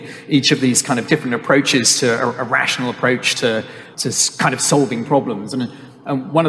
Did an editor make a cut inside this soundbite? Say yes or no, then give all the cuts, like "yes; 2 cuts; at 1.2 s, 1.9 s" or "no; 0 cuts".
no; 0 cuts